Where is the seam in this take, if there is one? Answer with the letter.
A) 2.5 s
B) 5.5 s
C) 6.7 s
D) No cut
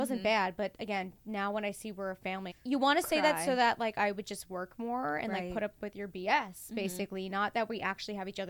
A